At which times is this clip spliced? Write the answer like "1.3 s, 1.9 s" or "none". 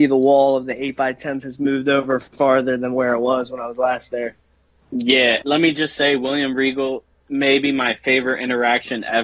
5.4 s